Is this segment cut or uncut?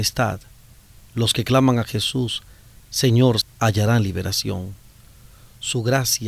cut